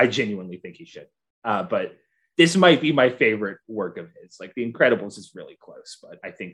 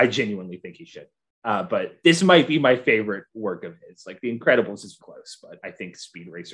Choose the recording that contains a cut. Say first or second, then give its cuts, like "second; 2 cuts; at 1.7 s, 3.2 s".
second; 2 cuts; at 2.0 s, 5.0 s